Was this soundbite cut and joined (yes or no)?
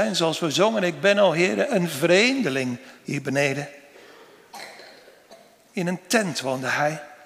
no